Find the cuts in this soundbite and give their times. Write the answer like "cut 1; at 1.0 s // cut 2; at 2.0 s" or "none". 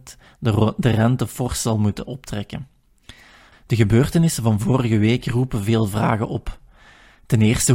cut 1; at 3.5 s